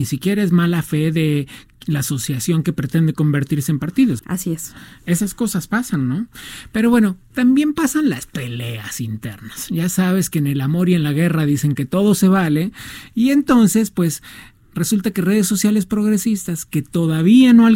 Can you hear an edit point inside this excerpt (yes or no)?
yes